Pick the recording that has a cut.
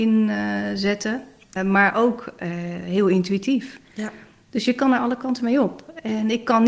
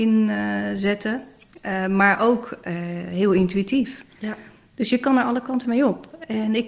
first; 1 cut; at 1.6 s

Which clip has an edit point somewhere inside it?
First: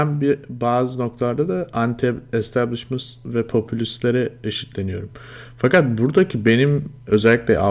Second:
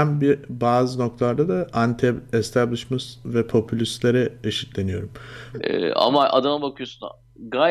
second; 1 cut; at 5.5 s

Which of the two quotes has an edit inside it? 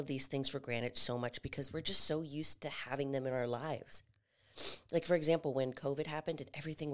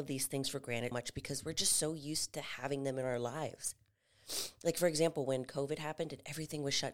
second; 1 cut; at 0.9 s

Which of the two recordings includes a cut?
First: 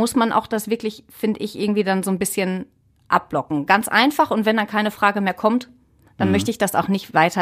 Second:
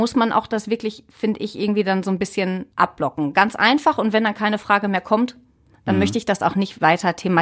second; 1 cut; at 2.7 s

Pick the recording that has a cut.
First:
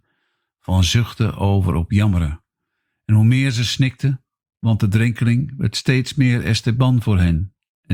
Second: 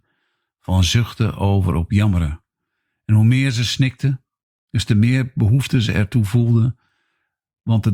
first; 1 cut; at 4.4 s

